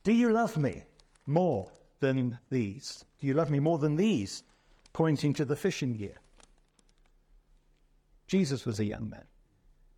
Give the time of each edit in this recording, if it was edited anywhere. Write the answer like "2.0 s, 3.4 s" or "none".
8.1 s